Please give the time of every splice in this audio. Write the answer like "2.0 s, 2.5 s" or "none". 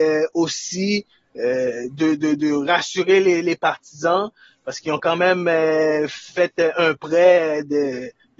none